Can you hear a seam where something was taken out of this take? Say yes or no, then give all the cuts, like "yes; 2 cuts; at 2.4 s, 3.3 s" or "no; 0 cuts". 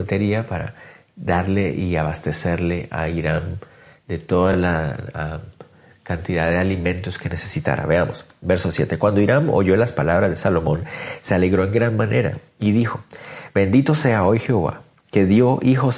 no; 0 cuts